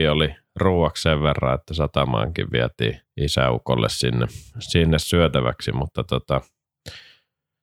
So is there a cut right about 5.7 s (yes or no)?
no